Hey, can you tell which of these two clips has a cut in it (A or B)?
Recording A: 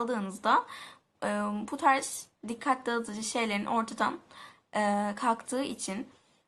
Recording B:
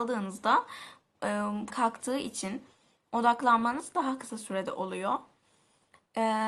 B